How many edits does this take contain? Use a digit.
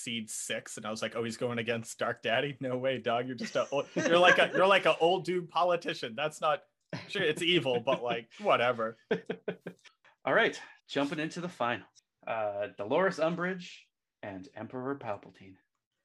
1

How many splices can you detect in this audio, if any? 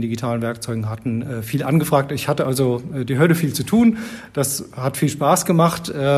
0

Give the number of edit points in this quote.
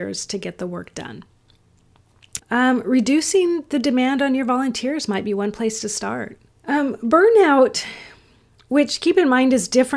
2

